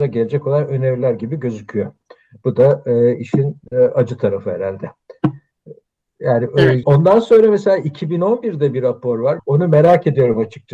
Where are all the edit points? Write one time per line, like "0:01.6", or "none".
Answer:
0:06.8
0:09.4

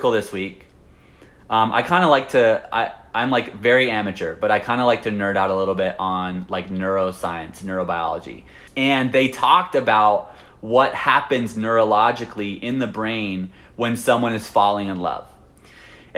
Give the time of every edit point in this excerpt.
0:08.7

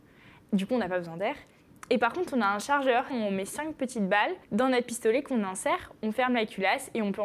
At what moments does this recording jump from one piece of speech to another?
0:03.1
0:04.4

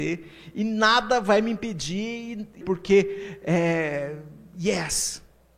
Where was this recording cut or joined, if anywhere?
0:02.6

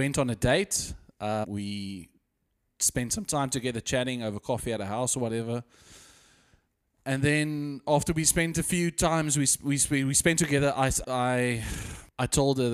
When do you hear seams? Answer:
0:01.4
0:11.0

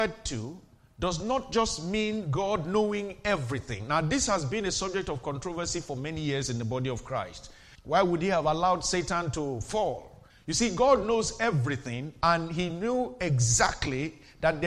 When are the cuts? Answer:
0:07.7
0:10.3

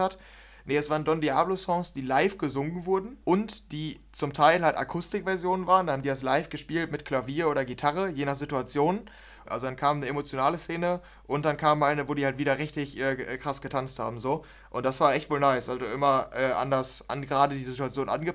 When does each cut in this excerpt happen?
0:03.2
0:09.4

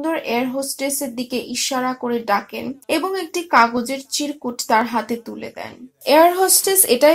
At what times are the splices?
0:02.8

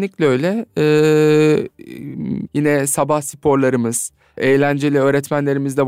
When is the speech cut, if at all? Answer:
0:02.5
0:04.4

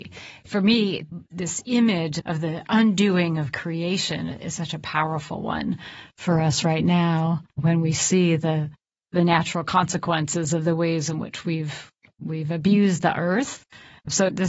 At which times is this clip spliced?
0:07.5

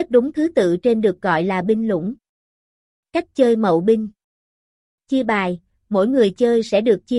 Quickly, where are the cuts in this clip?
none

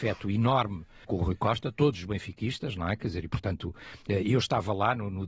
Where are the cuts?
0:01.0

